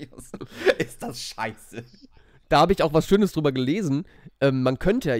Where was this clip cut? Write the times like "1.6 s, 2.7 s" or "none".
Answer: none